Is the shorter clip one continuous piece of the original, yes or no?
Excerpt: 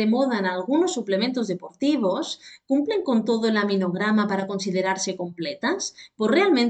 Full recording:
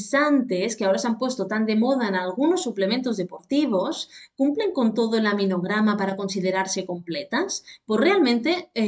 yes